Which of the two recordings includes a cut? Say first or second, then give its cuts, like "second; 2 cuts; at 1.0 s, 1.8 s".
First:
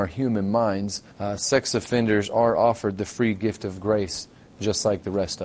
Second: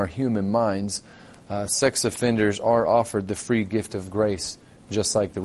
first; 1 cut; at 1.1 s